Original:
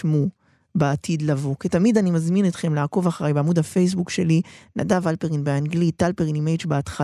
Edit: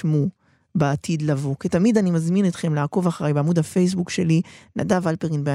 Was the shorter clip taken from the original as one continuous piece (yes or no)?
yes